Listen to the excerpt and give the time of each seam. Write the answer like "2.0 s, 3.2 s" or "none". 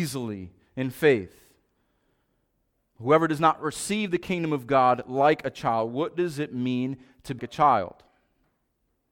7.4 s